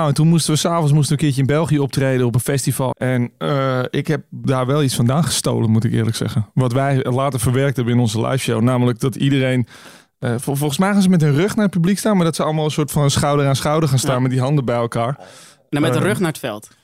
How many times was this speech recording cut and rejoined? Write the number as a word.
one